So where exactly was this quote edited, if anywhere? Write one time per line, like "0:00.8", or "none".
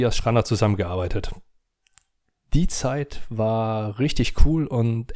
none